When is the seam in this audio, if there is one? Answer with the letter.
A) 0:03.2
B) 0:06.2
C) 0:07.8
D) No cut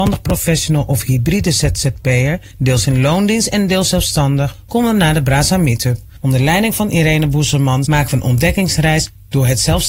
C